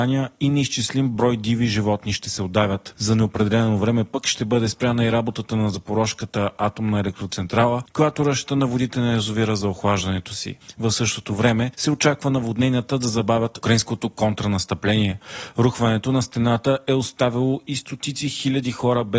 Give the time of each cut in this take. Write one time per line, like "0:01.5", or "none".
0:02.9